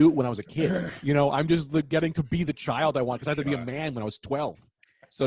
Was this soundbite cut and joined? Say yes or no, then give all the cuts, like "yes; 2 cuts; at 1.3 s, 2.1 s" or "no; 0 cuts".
no; 0 cuts